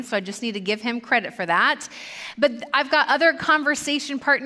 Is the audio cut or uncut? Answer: uncut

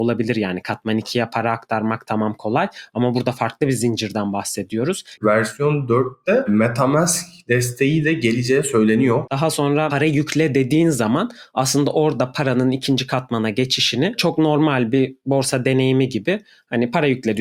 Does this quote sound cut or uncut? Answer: cut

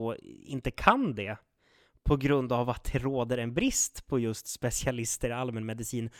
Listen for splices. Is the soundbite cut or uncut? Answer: uncut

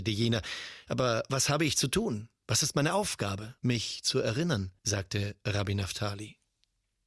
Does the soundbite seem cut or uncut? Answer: cut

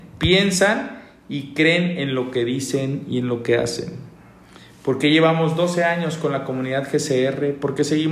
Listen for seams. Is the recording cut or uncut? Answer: uncut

